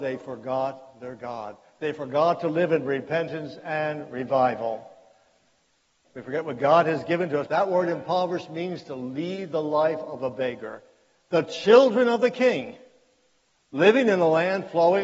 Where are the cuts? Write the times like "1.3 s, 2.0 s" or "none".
6.0 s, 7.5 s, 13.5 s